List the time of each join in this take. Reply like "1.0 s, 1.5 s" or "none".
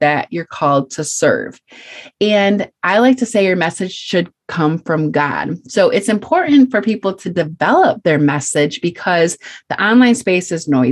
none